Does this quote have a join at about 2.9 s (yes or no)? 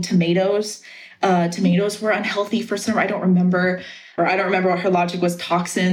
no